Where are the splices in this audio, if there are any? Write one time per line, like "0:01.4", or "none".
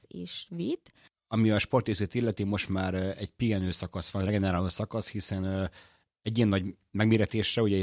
0:01.1